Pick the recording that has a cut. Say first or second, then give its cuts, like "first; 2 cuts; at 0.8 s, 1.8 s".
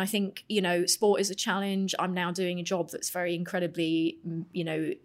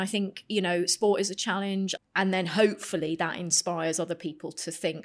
second; 1 cut; at 2.0 s